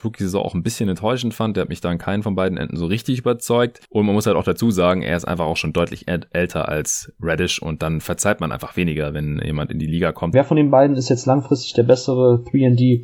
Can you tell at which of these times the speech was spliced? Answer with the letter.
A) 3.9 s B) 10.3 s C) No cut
B